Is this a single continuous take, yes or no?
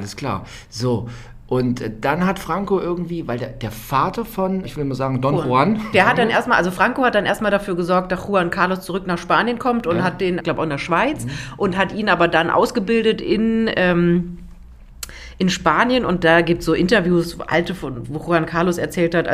no